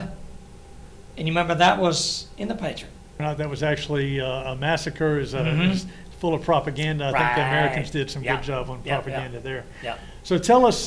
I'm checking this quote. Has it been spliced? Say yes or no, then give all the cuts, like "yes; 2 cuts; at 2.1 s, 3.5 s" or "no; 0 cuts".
yes; 1 cut; at 3.2 s